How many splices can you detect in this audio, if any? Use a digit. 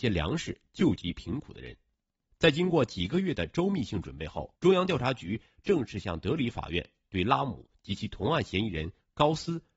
2